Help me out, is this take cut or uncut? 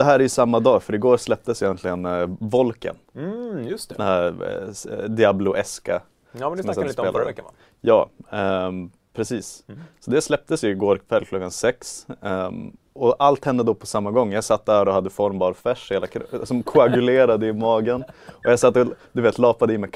uncut